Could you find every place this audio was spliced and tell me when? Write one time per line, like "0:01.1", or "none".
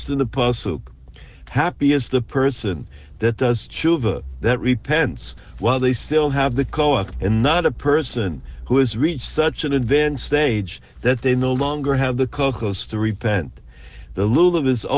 0:01.5
0:07.1

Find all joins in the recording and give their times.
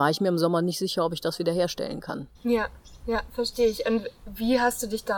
0:02.3

